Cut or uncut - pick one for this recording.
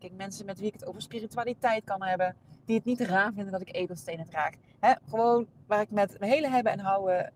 uncut